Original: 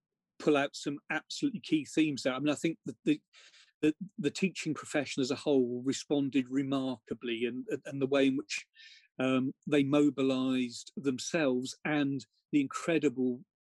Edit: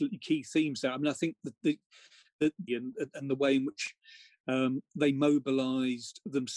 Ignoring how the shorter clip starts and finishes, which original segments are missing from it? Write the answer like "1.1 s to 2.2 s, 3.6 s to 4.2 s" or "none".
4.1 s to 7.4 s

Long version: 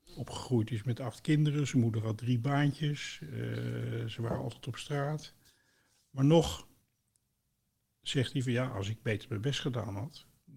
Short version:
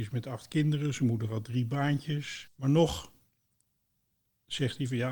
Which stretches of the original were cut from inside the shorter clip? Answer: 3.2 s to 6.0 s

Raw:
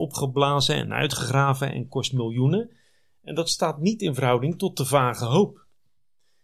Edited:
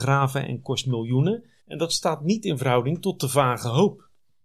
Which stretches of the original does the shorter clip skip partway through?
2.8 s to 3.2 s

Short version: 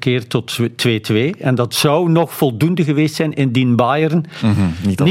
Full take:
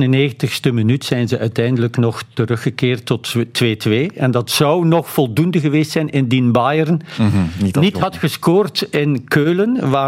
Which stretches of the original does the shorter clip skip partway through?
none

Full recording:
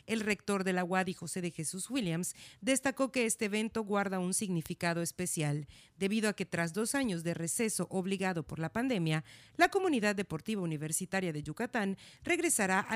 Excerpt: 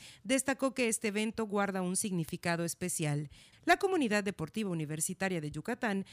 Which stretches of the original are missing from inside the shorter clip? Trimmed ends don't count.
5.9 s to 9.4 s

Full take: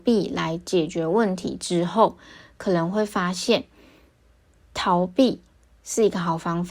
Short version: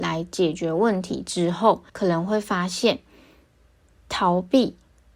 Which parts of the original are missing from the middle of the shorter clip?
2.2 s to 2.5 s

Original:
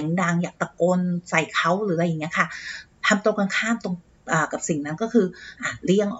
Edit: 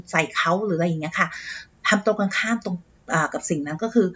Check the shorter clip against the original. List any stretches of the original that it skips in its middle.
none

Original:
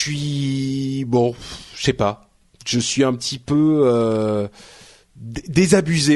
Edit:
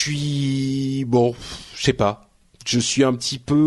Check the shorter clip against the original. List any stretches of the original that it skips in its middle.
none

